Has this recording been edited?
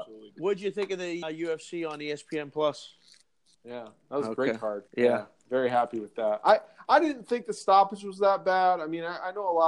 yes; 3 cuts; at 1.2 s, 3.5 s, 4.9 s

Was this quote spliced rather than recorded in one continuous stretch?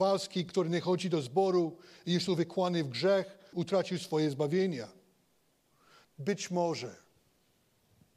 yes; 2 cuts; at 3.5 s, 6.0 s

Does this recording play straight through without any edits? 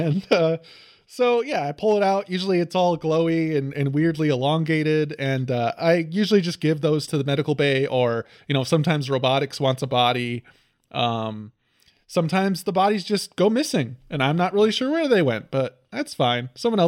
yes; 0 cuts

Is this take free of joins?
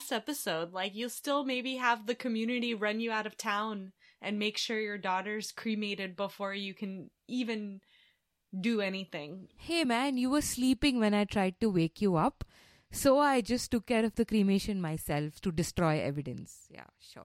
yes; 0 cuts

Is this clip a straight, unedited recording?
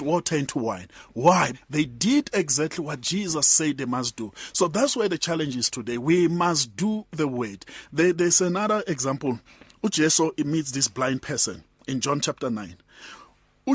no; 1 cut; at 1.5 s

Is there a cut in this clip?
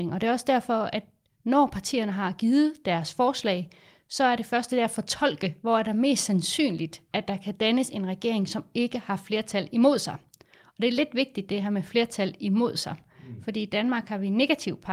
no; 0 cuts

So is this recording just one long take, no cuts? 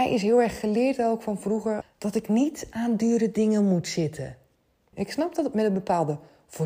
no; 2 cuts; at 1.8 s, 4.9 s

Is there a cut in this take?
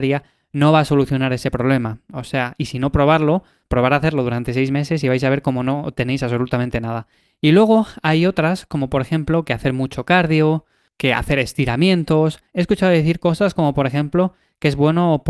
yes; 1 cut; at 12.5 s

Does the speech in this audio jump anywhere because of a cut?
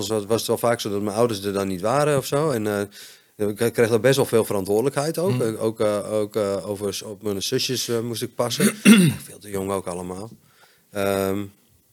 no; 0 cuts

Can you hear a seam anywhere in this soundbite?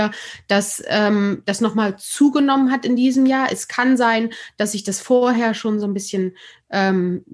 no; 0 cuts

